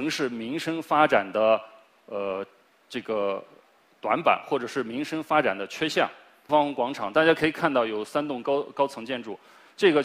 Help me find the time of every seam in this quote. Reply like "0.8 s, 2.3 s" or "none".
6.5 s